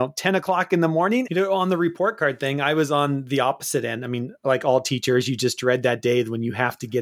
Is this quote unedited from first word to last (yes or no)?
no